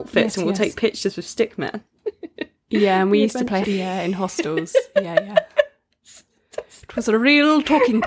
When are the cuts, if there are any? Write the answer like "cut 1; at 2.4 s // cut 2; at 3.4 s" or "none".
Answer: cut 1; at 3.6 s